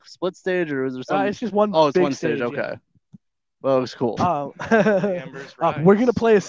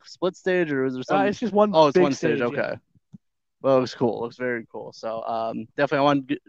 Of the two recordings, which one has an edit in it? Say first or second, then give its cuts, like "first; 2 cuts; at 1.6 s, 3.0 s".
first; 1 cut; at 4.2 s